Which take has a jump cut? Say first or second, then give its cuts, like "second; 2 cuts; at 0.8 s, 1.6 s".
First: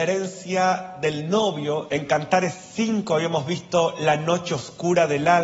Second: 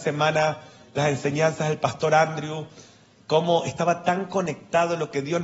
first; 1 cut; at 1.9 s